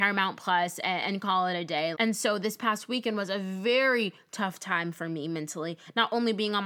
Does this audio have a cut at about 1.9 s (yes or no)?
yes